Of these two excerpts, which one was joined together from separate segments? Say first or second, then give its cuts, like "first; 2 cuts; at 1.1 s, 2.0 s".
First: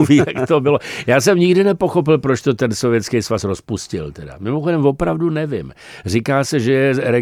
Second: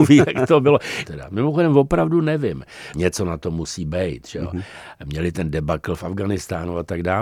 second; 2 cuts; at 1.0 s, 2.9 s